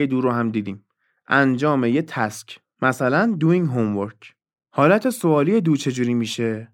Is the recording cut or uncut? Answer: uncut